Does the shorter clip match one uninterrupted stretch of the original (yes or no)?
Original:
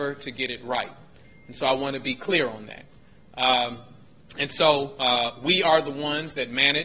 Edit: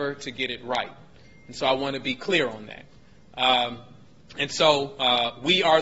yes